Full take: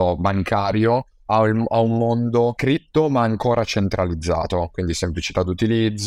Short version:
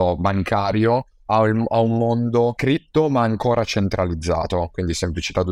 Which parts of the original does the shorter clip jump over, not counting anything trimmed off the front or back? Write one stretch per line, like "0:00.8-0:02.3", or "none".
none